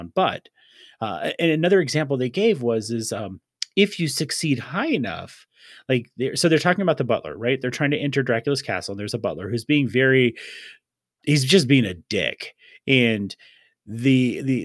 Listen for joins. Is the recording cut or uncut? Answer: uncut